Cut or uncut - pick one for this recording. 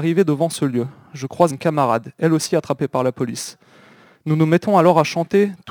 cut